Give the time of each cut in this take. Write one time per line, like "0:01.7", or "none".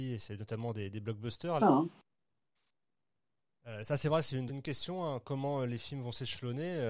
0:01.6
0:04.5